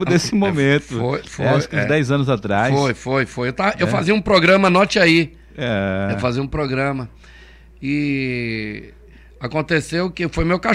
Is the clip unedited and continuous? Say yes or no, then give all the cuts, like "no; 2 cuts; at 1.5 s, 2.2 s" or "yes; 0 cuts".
yes; 0 cuts